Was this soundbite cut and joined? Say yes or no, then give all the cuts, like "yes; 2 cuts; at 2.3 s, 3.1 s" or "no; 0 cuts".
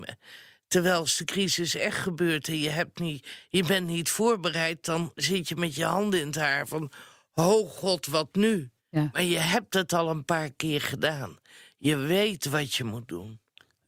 yes; 1 cut; at 8.8 s